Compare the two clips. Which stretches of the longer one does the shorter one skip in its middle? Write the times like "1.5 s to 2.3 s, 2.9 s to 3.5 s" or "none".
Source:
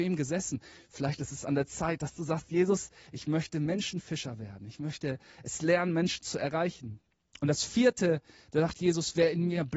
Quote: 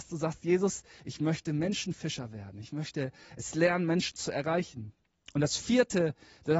none

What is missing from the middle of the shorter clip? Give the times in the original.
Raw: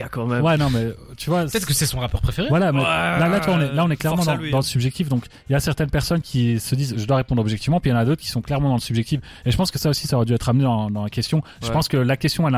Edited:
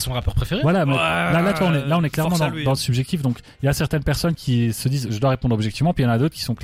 none

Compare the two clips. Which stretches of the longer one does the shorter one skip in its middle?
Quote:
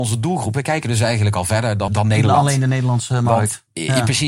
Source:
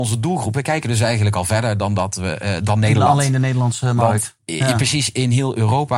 1.9 s to 2.6 s

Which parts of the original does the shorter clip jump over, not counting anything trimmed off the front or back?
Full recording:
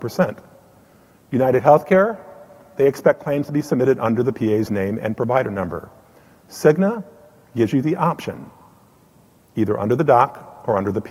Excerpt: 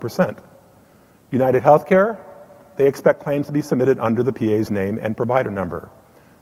none

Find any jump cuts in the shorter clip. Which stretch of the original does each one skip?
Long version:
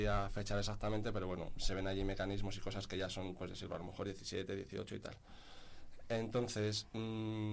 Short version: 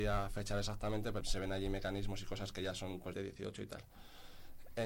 1.2 s to 1.6 s, 3.5 s to 4.5 s

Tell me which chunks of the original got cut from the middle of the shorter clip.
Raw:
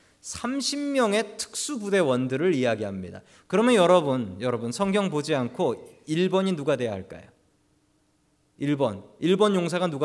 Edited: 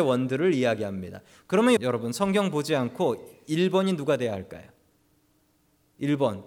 3.8 s to 4.4 s

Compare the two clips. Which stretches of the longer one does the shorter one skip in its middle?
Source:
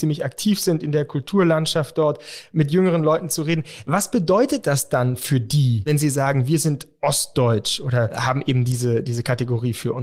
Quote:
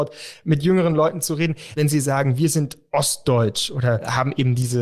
3.8 s to 5.8 s

